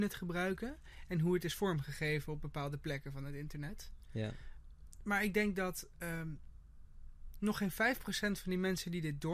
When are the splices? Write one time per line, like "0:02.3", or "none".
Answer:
none